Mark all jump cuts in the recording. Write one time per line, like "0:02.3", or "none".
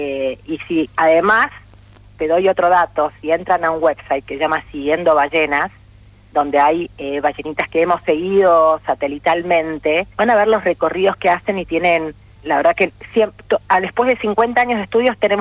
0:10.1
0:12.3

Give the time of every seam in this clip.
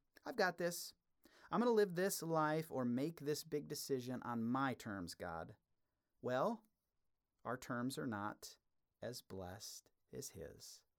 none

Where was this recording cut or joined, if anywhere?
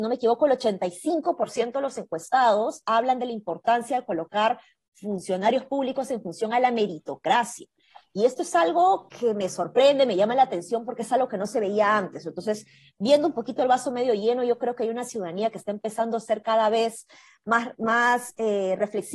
none

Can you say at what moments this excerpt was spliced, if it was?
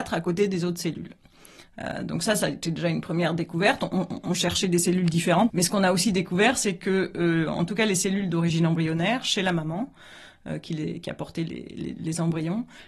0:05.5

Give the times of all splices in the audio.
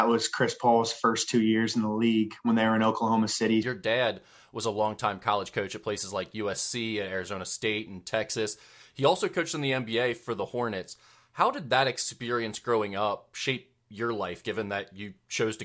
0:03.6

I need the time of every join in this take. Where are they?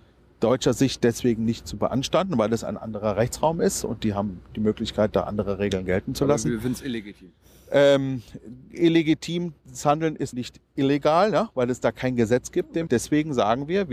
0:10.3
0:12.9

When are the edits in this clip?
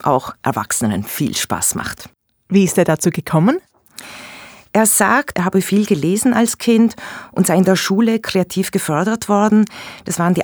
0:05.3

